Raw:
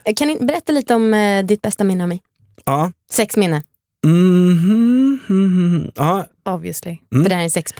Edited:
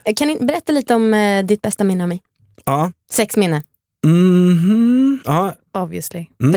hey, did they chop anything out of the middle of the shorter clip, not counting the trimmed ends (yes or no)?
yes